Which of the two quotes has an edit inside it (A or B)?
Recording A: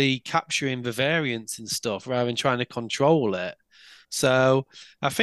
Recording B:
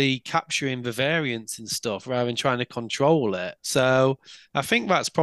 B